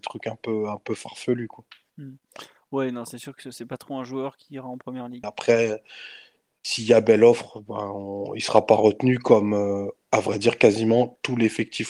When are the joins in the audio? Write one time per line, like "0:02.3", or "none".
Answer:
0:05.2